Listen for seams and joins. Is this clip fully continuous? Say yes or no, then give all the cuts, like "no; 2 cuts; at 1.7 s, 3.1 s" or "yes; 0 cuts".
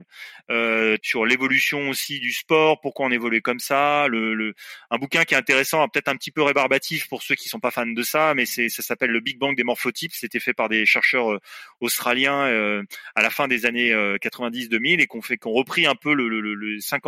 no; 1 cut; at 1.0 s